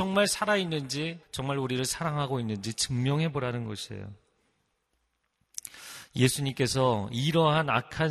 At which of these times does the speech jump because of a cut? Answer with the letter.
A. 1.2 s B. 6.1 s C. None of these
A